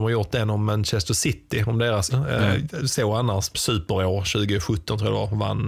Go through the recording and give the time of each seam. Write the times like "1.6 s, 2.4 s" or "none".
2.1 s, 3.5 s